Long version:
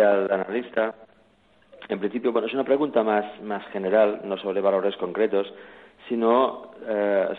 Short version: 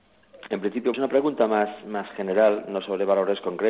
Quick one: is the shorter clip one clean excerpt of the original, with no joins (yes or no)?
no